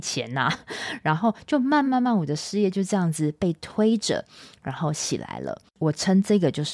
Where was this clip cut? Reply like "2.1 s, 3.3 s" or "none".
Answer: 1.9 s